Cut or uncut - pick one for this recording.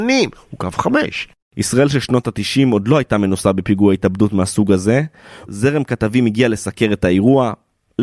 cut